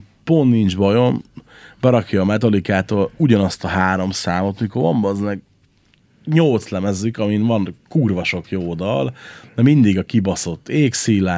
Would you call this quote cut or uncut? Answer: uncut